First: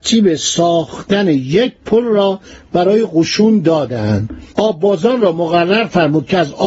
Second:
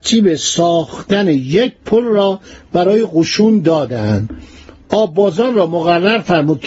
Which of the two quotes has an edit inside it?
first; 1 cut; at 4.5 s

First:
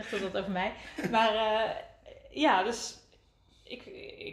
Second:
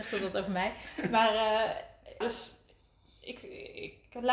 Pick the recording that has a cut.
second; 1 cut; at 2.2 s

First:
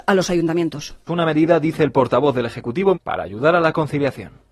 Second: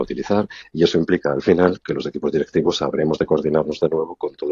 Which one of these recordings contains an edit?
first; 2 cuts; at 1.1 s, 2.9 s

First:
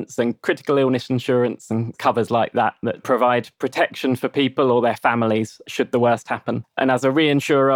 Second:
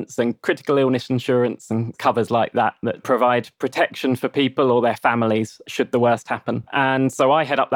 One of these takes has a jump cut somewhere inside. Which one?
first; 1 cut; at 6.6 s

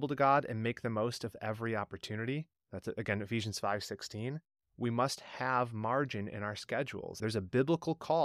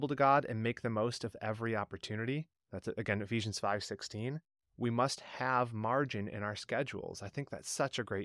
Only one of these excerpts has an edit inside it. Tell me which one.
first; 1 cut; at 7.2 s

